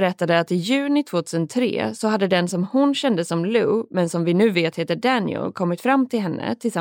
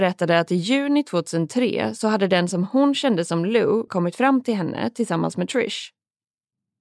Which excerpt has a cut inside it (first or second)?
second